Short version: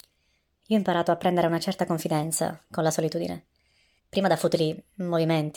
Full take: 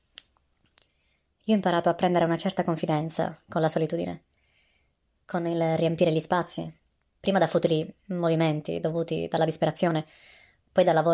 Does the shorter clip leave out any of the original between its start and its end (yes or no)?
yes